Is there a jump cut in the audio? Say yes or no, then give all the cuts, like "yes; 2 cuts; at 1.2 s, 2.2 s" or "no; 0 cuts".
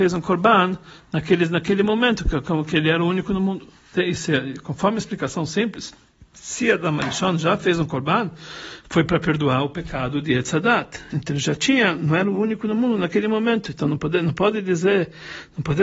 yes; 1 cut; at 11.1 s